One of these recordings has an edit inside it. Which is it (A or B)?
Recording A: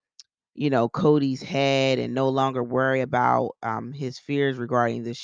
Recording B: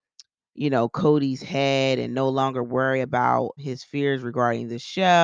B